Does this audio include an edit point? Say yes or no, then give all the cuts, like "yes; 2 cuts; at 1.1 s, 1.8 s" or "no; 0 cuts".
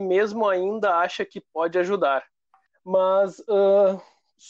yes; 1 cut; at 2.7 s